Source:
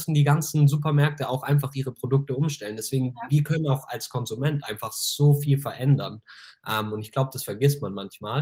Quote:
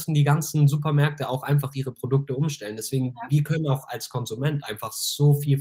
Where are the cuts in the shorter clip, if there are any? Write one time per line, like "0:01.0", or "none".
none